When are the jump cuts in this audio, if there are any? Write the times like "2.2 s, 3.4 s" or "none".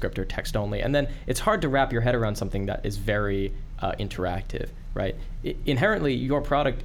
none